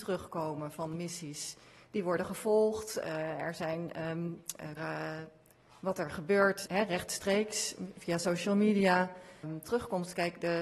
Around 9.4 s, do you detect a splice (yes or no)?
yes